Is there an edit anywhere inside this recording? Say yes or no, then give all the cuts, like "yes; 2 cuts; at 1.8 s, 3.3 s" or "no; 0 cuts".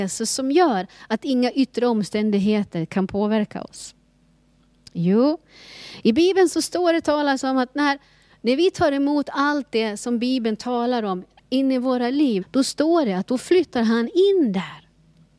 yes; 2 cuts; at 8.3 s, 12.4 s